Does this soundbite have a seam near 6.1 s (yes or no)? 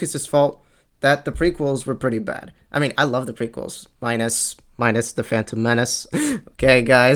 yes